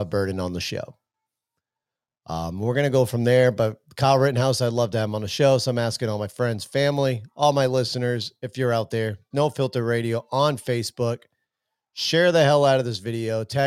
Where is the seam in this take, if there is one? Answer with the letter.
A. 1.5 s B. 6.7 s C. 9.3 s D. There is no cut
C